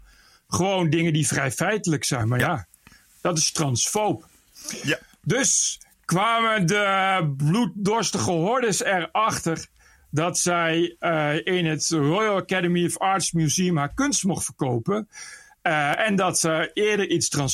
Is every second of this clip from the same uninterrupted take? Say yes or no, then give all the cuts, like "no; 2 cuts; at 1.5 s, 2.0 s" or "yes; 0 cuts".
yes; 0 cuts